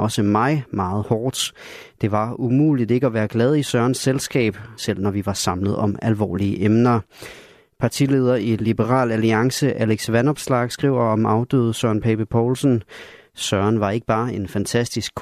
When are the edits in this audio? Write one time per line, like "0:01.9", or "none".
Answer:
0:04.8